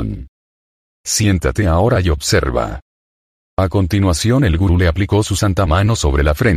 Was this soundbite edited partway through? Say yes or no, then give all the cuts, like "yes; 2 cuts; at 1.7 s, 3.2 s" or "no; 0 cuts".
yes; 1 cut; at 0.9 s